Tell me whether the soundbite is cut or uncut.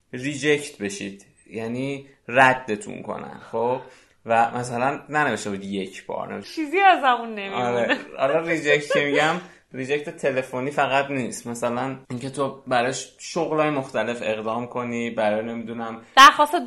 cut